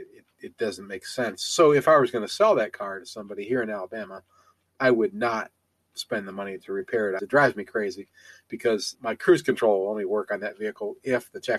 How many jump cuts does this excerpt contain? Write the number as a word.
two